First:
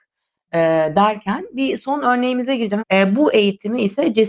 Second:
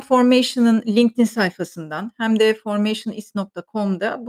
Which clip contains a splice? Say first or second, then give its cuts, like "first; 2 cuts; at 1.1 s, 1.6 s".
first; 1 cut; at 2.8 s